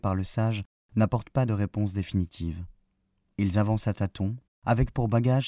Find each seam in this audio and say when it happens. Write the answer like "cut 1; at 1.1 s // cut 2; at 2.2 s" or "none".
cut 1; at 4.5 s